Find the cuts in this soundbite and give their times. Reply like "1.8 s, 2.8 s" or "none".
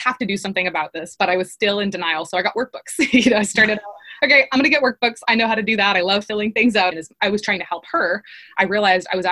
6.9 s